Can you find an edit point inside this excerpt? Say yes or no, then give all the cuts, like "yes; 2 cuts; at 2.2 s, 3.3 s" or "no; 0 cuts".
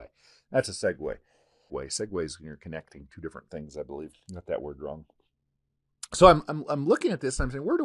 yes; 1 cut; at 1.7 s